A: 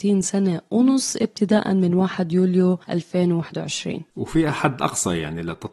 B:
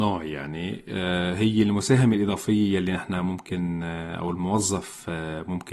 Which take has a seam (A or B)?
A